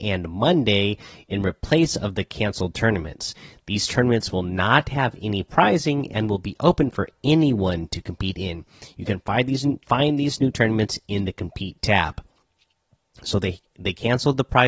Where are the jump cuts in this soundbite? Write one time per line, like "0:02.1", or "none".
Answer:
0:09.8

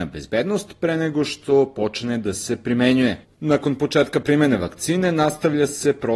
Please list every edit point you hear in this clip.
0:03.2

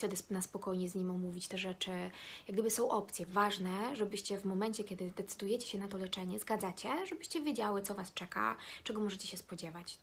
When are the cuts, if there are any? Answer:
none

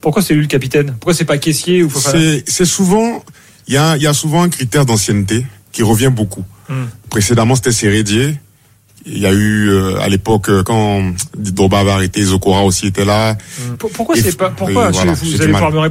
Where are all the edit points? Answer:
0:10.6
0:13.7

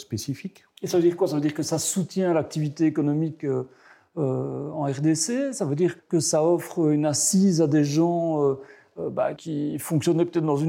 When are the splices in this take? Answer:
0:06.0
0:09.4

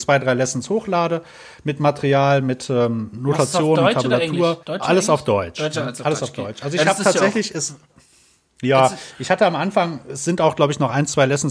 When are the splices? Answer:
0:04.6

